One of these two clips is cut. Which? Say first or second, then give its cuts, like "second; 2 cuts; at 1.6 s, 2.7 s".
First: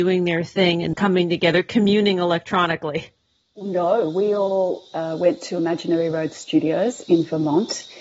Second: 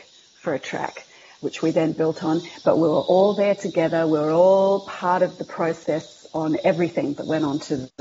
first; 1 cut; at 0.9 s